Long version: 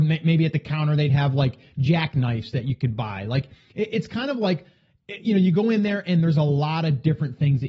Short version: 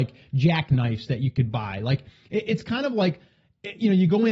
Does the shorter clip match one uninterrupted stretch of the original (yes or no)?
yes